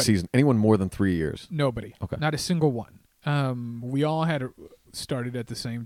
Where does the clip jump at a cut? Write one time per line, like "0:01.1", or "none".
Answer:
none